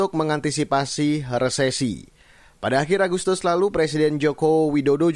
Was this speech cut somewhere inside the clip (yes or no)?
no